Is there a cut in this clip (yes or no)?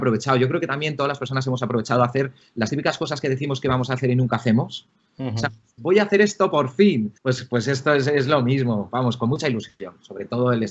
yes